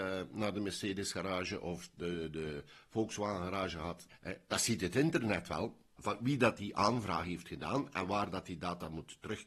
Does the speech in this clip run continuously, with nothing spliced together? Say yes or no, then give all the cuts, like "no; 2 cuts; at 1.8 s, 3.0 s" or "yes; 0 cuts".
no; 2 cuts; at 4.1 s, 6.0 s